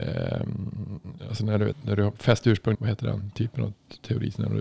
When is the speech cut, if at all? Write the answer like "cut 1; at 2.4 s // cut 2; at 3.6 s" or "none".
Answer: cut 1; at 1.7 s // cut 2; at 2.7 s

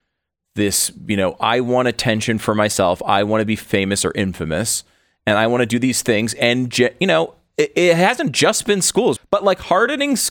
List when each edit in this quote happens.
cut 1; at 9.2 s

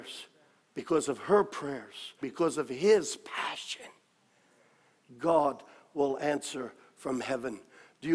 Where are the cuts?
cut 1; at 2.2 s

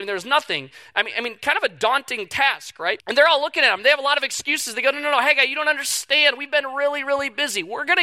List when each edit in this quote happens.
cut 1; at 3.0 s

